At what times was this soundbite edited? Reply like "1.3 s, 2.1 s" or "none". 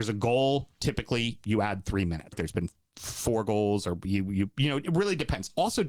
2.3 s